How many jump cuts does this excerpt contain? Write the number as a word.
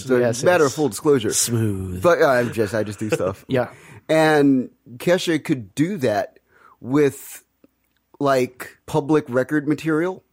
two